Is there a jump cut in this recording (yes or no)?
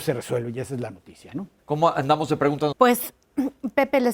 yes